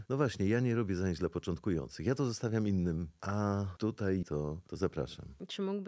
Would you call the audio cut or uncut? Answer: cut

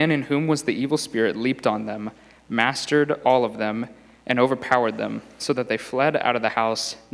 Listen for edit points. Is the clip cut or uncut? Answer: uncut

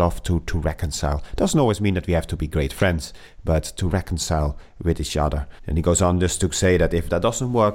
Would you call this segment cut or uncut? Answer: cut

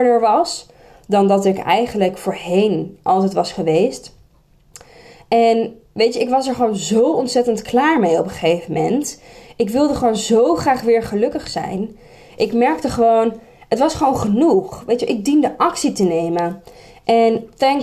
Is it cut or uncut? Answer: uncut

